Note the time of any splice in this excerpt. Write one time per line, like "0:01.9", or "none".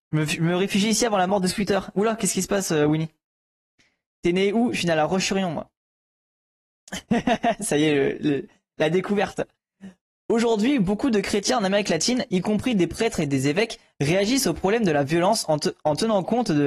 none